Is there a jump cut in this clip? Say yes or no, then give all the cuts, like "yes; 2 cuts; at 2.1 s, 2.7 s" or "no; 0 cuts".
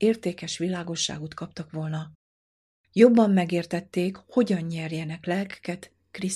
no; 0 cuts